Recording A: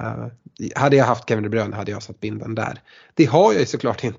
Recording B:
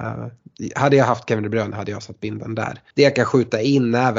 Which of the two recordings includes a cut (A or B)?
B